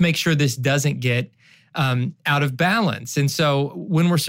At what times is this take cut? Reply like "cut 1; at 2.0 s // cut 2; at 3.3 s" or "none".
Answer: none